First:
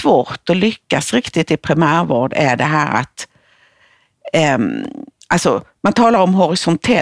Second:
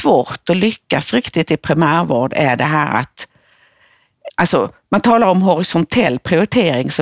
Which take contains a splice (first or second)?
second